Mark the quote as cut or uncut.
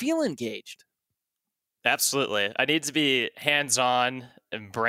uncut